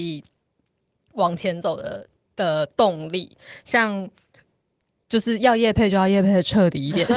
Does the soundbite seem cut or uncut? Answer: uncut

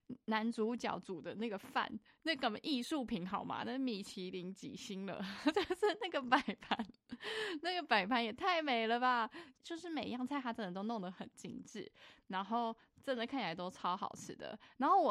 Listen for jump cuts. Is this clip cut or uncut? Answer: cut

